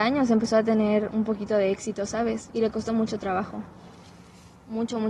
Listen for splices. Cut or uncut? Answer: uncut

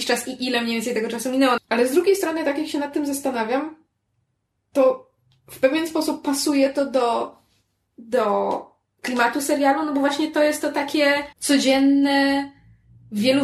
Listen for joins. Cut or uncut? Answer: cut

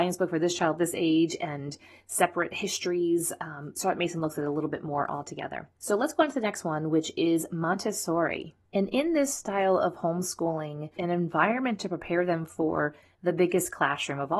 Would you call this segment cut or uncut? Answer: cut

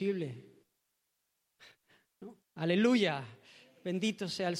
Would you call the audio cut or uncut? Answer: cut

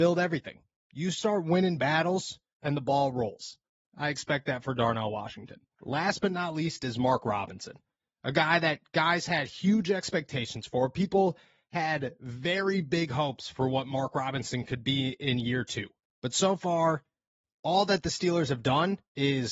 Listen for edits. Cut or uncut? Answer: cut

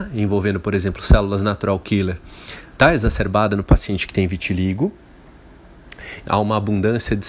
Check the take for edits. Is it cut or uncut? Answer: cut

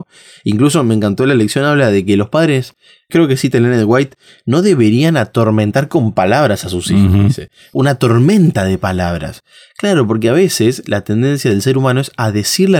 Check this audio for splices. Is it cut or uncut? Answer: uncut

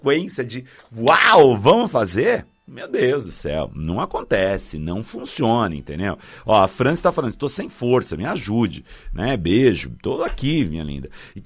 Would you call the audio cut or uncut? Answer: uncut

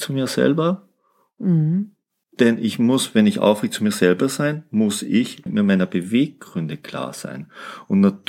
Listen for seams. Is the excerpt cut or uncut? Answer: cut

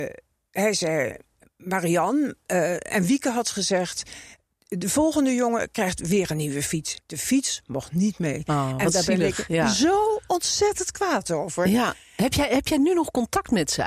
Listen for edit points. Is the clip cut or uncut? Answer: cut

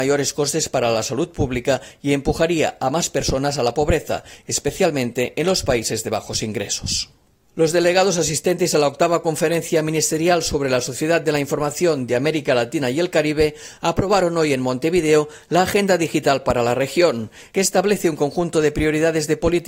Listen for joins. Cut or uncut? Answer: uncut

